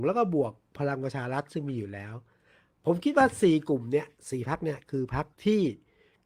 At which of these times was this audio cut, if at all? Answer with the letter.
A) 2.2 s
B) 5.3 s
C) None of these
B